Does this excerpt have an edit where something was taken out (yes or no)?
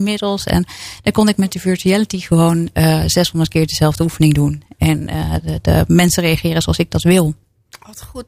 no